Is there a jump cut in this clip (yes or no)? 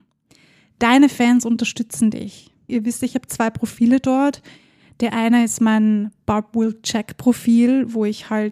yes